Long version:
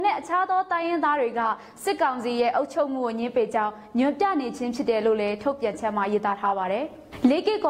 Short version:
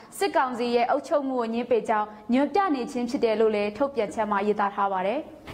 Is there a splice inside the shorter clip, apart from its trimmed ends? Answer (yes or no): no